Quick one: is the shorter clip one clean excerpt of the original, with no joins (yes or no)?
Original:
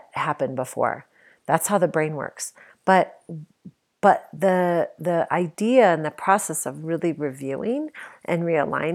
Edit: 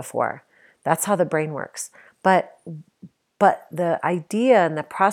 no